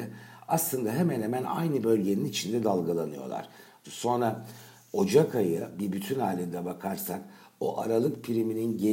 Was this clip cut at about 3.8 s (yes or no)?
yes